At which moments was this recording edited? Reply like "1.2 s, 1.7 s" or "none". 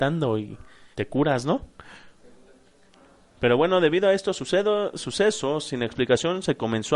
0.9 s